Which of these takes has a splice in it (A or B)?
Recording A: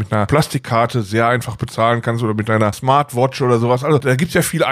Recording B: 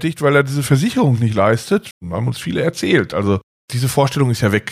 B